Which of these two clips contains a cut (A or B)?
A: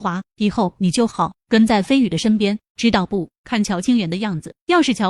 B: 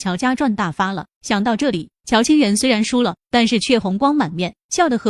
A